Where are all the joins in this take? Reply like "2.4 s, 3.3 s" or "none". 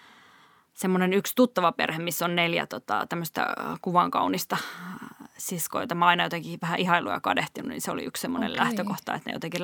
none